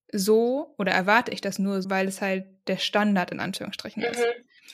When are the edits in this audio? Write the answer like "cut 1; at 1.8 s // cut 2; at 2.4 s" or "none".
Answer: cut 1; at 1.8 s